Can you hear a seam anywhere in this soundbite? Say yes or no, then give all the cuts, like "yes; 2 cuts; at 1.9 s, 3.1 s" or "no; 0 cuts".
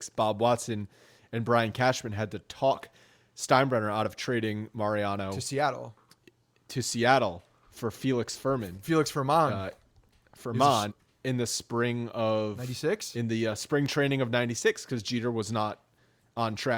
yes; 1 cut; at 10.9 s